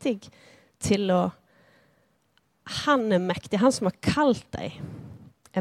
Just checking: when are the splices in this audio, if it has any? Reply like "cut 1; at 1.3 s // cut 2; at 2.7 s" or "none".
none